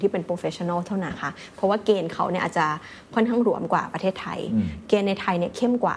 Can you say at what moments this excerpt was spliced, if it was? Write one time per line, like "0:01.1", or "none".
0:01.1